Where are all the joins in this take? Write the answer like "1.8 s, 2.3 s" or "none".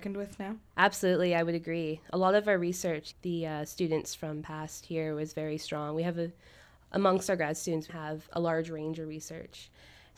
3.1 s, 7.9 s

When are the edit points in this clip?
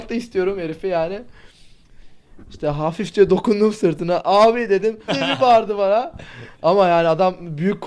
5.1 s

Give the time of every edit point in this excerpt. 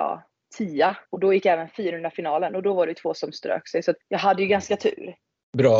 1.0 s

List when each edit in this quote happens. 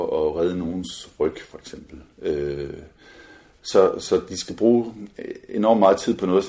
none

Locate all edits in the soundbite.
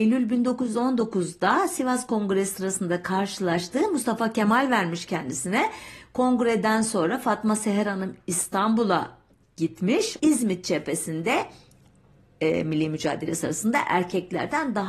10.2 s

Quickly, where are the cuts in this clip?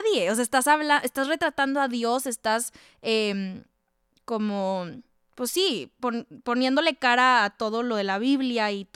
none

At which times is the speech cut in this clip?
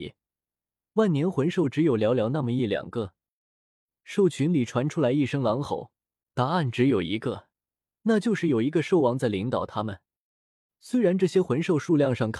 6.2 s, 10.7 s

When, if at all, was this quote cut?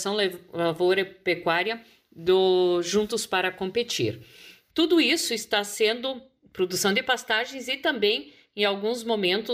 4.7 s

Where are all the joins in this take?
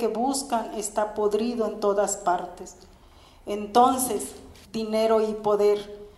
4.6 s

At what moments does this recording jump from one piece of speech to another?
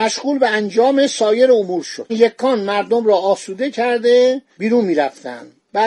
2.1 s

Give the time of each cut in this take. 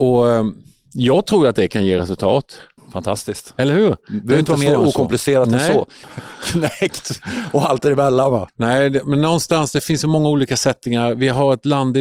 2.8 s, 6.0 s, 8.5 s

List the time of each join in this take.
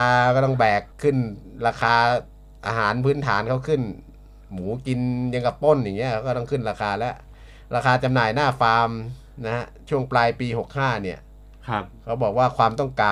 0.9 s

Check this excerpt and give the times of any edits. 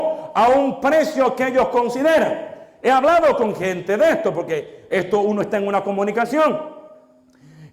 none

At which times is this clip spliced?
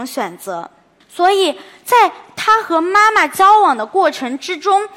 1.0 s

